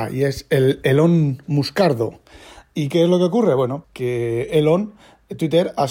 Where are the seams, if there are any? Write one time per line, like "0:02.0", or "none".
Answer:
0:03.8